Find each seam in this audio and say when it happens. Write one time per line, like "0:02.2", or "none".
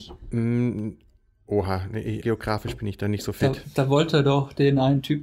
0:02.2

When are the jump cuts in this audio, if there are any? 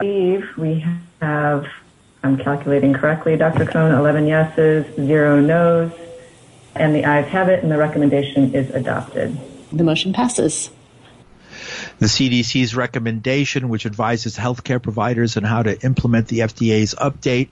0:09.7

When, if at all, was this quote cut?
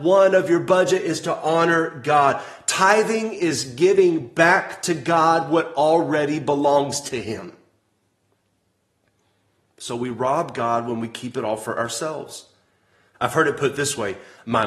0:13.1

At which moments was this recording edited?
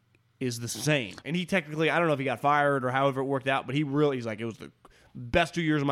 0:01.2

